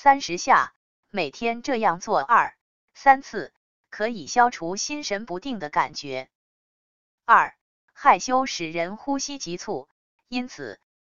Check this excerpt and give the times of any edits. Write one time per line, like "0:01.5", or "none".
none